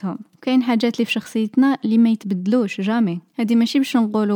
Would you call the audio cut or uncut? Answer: cut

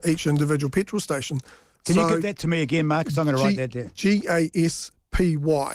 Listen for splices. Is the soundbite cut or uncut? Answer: uncut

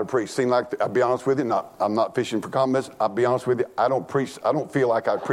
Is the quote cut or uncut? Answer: uncut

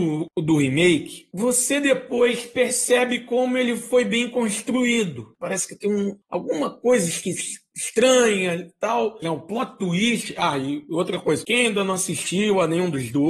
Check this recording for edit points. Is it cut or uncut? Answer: cut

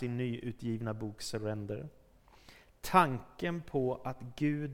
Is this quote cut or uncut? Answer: uncut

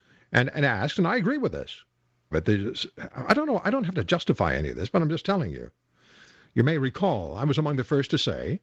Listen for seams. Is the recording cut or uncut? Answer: cut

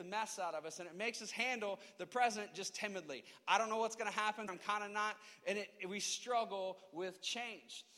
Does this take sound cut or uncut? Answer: cut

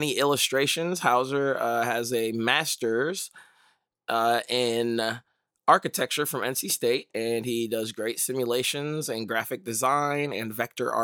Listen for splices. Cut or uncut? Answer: uncut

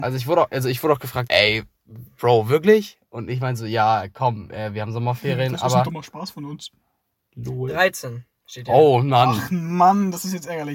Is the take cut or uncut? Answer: cut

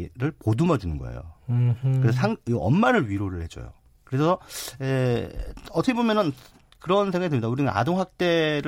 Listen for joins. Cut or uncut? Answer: uncut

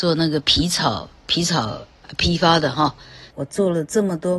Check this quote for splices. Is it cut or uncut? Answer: cut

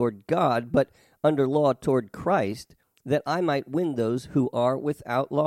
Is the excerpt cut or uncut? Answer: uncut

